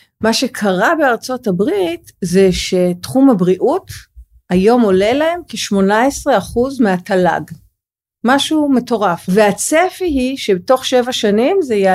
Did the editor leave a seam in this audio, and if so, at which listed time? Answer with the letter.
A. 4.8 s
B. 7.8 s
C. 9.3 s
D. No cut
C